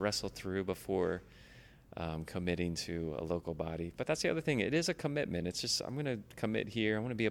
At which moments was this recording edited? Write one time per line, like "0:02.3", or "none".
none